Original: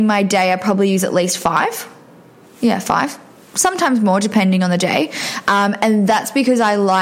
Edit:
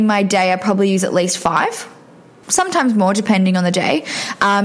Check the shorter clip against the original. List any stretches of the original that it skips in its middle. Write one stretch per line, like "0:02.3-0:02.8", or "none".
0:02.4-0:03.5